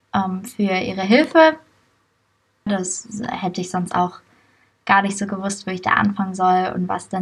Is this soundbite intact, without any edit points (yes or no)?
no